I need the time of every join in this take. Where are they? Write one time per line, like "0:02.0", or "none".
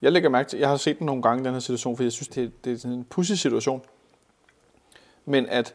0:02.3